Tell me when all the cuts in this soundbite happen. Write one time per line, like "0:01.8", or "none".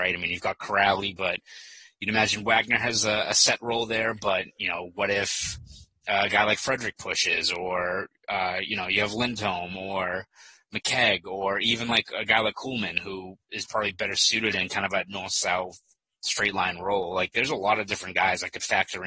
none